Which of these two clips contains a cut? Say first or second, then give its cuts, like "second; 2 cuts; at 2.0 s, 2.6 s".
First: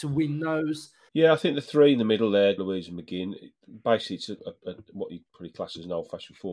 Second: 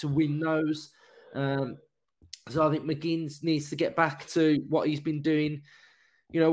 first; 3 cuts; at 1.1 s, 2.6 s, 4.4 s